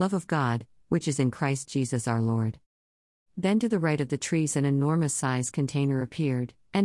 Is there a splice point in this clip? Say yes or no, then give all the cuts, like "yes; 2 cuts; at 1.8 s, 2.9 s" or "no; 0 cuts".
no; 0 cuts